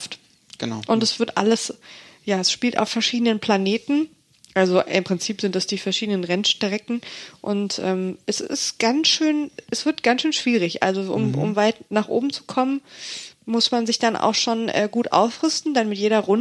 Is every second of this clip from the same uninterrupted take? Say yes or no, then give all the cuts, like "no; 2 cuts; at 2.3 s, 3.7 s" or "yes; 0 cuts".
yes; 0 cuts